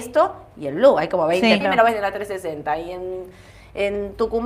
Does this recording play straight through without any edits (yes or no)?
no